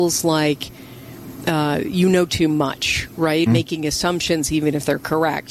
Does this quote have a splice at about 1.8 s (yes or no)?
no